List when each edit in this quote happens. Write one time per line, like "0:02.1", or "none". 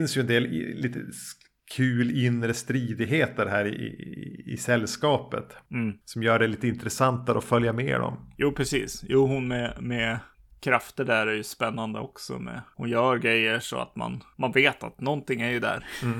none